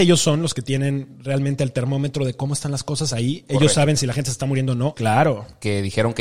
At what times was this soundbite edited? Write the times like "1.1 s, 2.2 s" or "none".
4.9 s